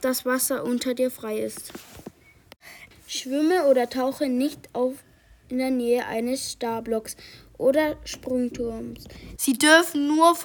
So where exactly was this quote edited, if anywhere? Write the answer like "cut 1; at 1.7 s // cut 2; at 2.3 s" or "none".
cut 1; at 2.9 s // cut 2; at 9.4 s